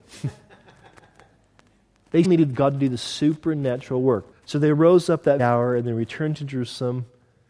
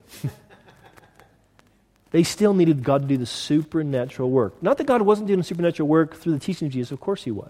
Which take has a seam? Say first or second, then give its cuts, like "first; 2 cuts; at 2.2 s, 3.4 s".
first; 3 cuts; at 2.2 s, 4.3 s, 5.4 s